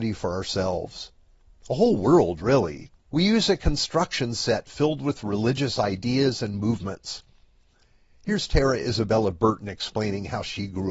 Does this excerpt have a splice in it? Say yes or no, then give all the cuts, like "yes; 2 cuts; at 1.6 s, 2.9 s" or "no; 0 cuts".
yes; 1 cut; at 3.1 s